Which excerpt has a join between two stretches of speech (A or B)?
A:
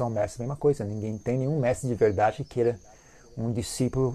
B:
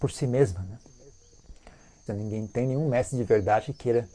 B